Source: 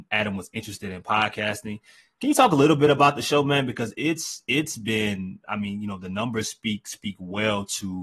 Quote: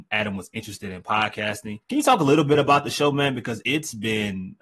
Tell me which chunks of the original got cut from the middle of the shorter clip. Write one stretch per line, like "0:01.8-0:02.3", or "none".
0:01.8-0:02.1
0:03.9-0:04.5